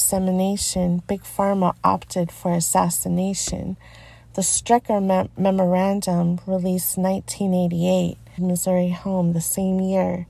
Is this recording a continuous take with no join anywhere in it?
no; 1 cut; at 8.4 s

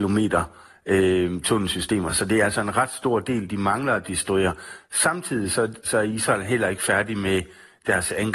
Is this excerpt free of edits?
yes; 0 cuts

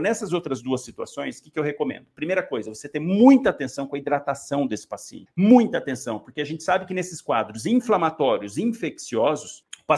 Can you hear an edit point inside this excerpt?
no; 0 cuts

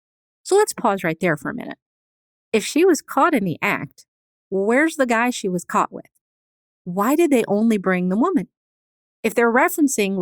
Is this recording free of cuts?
yes; 0 cuts

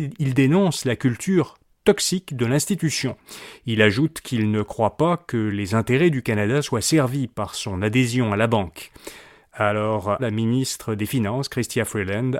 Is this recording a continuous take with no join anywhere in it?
no; 1 cut; at 10.2 s

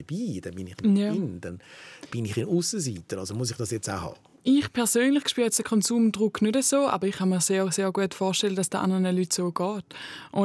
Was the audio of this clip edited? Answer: no; 0 cuts

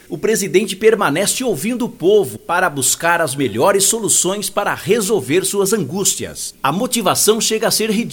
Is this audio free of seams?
no; 1 cut; at 6.5 s

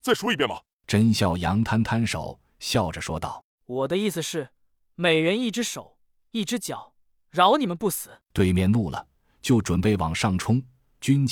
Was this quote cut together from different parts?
no; 0 cuts

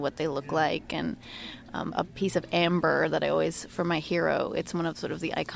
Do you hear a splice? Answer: yes; 1 cut; at 1.9 s

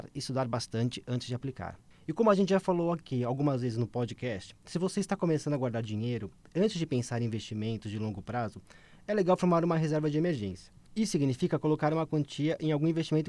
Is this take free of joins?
yes; 0 cuts

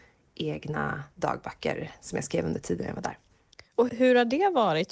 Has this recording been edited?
yes; 1 cut; at 3.9 s

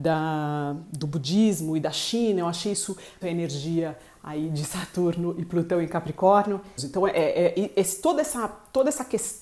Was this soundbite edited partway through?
yes; 2 cuts; at 3.2 s, 6.8 s

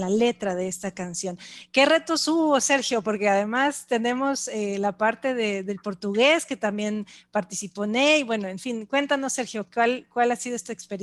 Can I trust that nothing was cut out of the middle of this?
yes; 0 cuts

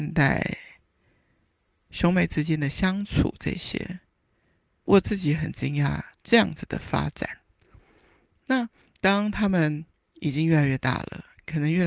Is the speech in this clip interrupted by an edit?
no; 0 cuts

